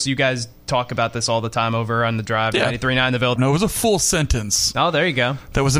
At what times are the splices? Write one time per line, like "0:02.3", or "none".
0:03.4